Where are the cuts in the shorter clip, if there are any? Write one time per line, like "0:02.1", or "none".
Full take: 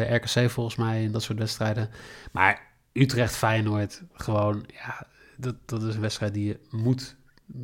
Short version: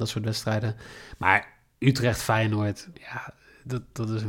0:02.9